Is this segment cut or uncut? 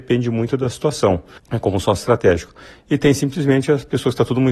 cut